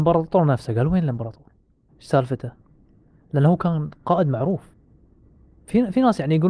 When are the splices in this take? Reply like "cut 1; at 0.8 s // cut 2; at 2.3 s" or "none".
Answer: cut 1; at 1.9 s